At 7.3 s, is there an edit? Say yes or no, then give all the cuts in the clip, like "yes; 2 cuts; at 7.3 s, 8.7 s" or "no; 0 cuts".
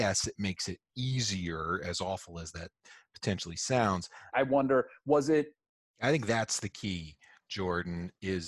no; 2 cuts; at 4.3 s, 5.9 s